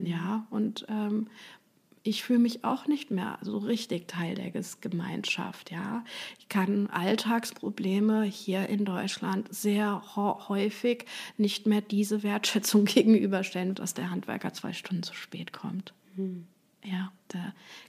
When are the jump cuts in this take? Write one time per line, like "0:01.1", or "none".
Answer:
0:13.7